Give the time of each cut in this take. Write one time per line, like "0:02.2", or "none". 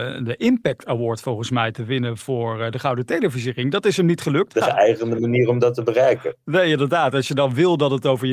0:04.5